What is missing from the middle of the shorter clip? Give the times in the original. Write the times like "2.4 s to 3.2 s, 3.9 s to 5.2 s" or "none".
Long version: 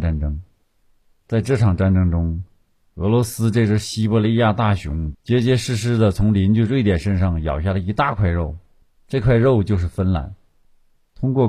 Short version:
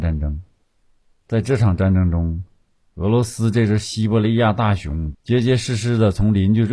none